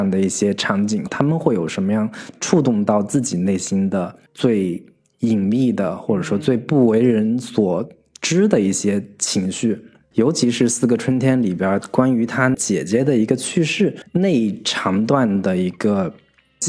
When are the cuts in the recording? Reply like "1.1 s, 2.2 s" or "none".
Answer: 1.1 s, 10.1 s